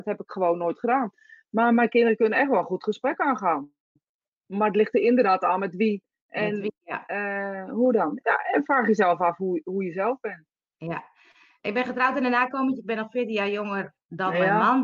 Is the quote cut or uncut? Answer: uncut